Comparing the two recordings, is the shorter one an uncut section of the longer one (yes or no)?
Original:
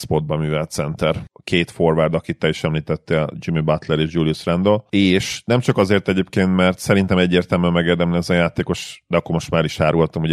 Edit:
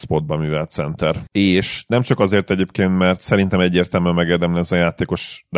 no